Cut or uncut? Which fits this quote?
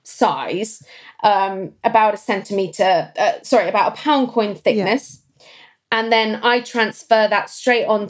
uncut